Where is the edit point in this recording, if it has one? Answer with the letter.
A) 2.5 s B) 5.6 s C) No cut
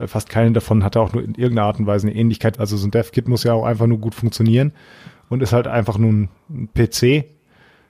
A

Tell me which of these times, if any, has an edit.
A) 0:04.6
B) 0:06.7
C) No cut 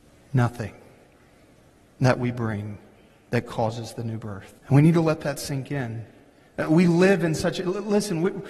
A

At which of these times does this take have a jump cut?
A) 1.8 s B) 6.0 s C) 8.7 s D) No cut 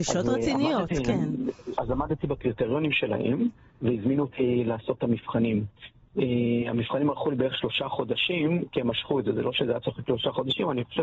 A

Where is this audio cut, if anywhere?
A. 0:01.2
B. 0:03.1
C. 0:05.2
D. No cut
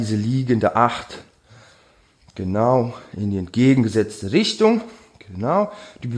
D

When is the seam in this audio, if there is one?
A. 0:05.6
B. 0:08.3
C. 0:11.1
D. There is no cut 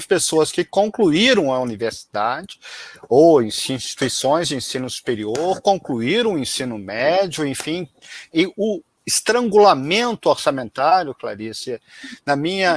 B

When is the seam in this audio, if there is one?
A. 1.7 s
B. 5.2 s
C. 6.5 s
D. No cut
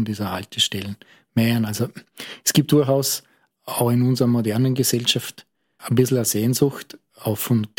D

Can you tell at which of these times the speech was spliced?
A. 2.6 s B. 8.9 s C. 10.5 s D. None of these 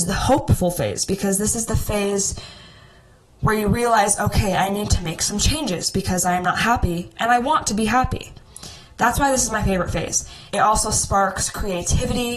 C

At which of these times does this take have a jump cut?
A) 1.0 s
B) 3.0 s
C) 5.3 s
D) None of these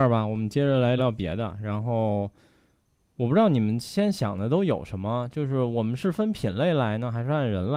A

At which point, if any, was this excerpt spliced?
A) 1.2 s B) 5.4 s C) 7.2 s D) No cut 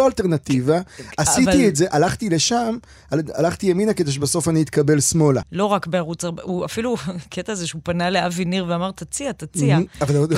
B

